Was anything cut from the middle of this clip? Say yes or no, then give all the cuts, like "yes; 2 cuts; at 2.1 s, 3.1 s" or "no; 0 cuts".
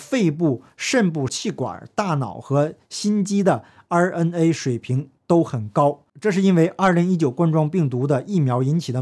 yes; 1 cut; at 1.3 s